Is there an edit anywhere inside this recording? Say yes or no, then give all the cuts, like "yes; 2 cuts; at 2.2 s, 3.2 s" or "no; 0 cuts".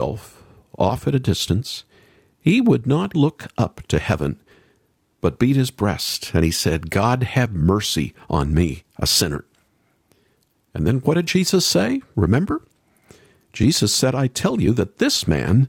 yes; 1 cut; at 3.1 s